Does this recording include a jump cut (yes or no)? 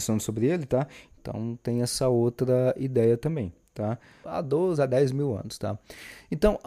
yes